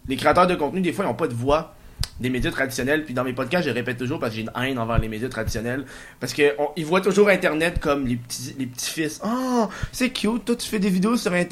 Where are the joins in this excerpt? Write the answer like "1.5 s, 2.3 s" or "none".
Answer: none